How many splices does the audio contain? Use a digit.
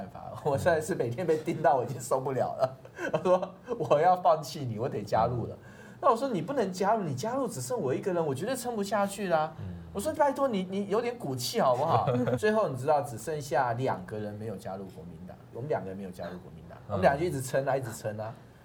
2